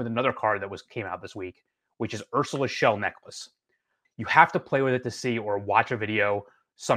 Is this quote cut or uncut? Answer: cut